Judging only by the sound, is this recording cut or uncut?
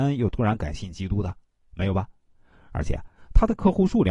uncut